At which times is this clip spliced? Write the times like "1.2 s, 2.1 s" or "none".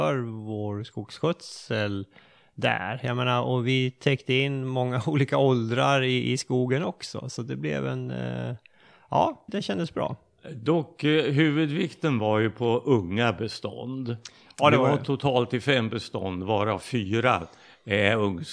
9.5 s

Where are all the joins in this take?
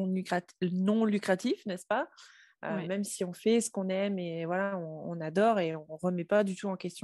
none

